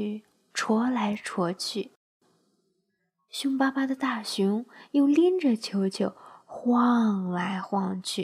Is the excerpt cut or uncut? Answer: uncut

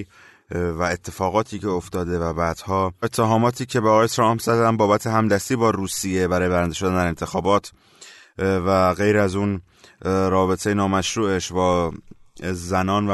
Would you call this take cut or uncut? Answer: uncut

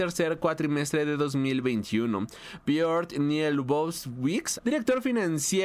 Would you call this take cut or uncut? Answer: cut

